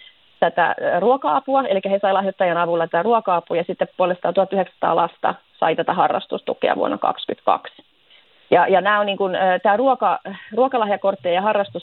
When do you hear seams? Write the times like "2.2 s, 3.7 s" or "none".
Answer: none